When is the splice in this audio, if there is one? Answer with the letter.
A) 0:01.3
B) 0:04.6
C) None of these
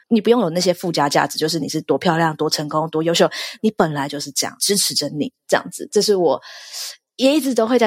B